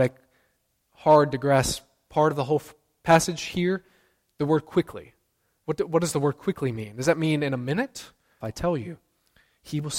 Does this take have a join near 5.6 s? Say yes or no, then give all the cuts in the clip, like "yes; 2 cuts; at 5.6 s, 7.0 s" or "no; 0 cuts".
yes; 2 cuts; at 5.6 s, 8.4 s